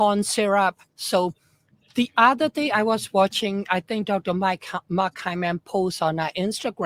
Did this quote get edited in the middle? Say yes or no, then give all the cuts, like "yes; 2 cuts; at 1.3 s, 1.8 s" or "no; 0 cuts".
no; 0 cuts